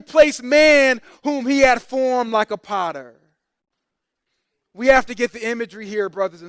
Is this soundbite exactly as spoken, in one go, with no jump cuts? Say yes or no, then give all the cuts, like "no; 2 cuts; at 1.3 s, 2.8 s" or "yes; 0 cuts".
yes; 0 cuts